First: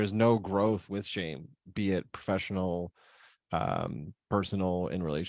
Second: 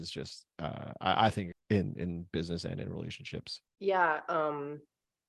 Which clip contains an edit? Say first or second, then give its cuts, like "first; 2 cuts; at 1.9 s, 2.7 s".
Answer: second; 2 cuts; at 1.5 s, 3.7 s